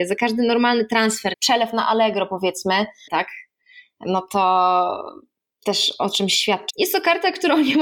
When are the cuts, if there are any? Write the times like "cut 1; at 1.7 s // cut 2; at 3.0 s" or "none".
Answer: cut 1; at 1.3 s // cut 2; at 3.1 s // cut 3; at 6.7 s